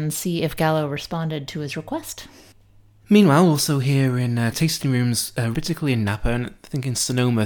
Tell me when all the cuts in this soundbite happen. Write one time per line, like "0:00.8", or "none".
0:04.5
0:05.5